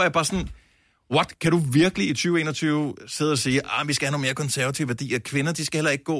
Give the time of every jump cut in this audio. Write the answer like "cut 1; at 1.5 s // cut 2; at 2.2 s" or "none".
none

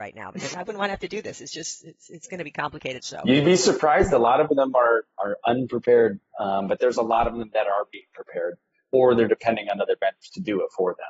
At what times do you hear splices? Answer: cut 1; at 3.0 s

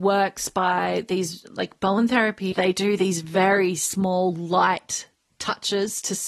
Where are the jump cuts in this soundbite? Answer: cut 1; at 2.5 s

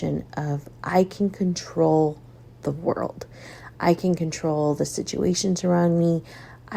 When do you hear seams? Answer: none

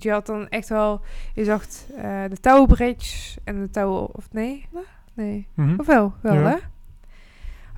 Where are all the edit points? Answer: cut 1; at 4.7 s

